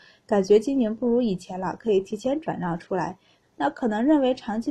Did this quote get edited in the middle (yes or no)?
yes